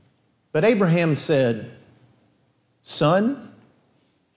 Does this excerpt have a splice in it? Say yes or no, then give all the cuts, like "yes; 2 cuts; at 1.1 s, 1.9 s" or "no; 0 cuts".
no; 0 cuts